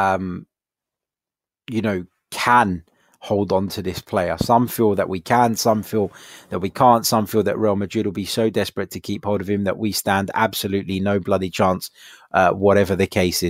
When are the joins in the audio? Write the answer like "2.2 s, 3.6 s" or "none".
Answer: none